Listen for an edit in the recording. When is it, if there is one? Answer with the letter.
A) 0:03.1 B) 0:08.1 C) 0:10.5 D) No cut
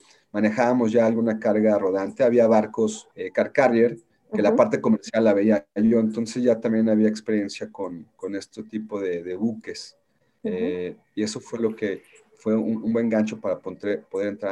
A